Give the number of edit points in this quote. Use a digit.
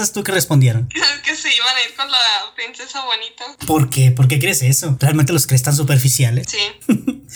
0